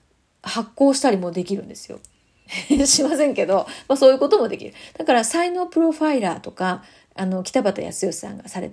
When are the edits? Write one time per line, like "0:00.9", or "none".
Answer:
0:02.5